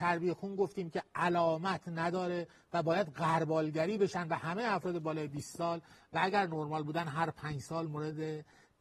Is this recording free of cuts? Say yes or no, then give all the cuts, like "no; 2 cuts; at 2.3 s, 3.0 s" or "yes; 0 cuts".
yes; 0 cuts